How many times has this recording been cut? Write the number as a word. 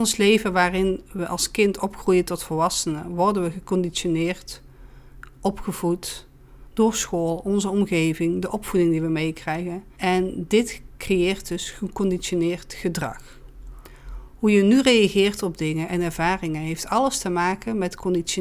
one